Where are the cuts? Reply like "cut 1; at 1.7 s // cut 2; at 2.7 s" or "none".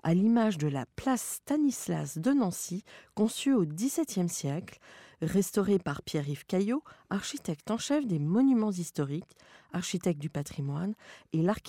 none